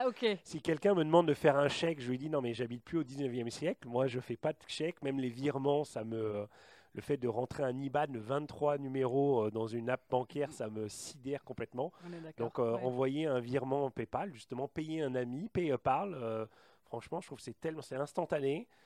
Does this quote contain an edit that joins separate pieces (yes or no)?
no